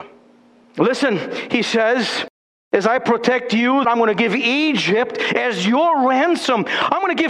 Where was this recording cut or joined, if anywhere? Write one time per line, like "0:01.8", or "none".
0:03.8

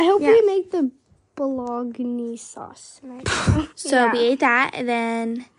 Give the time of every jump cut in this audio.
0:03.7

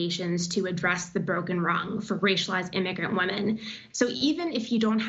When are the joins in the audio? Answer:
0:03.9

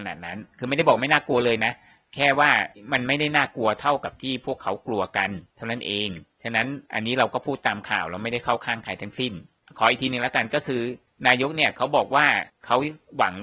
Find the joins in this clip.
0:05.5
0:06.8

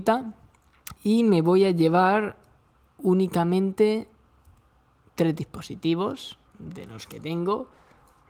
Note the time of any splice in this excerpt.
0:01.0
0:06.5

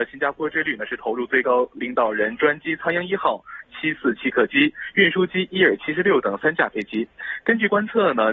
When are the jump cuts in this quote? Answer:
0:03.6

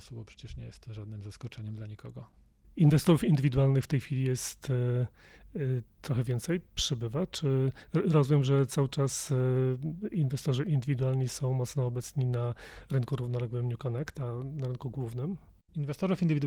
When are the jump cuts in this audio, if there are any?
none

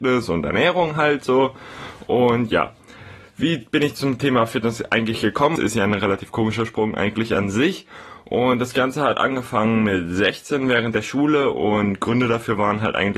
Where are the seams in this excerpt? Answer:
0:05.6

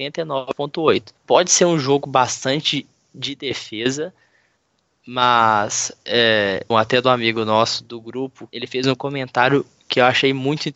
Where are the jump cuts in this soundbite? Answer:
0:01.2
0:06.7
0:08.5

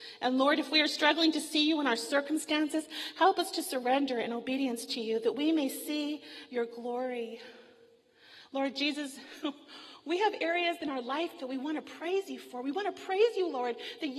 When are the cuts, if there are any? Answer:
none

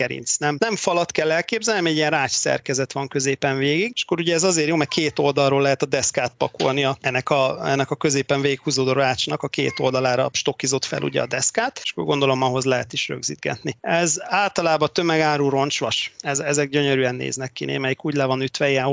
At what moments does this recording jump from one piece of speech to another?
0:13.8

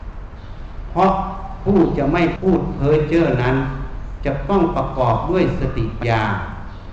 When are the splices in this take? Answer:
0:06.0

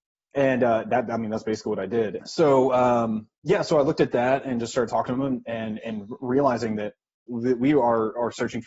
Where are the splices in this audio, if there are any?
0:02.2
0:07.3

